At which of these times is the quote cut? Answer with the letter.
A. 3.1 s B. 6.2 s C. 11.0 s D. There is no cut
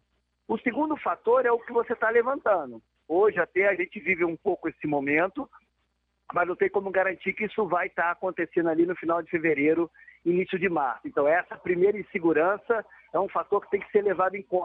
A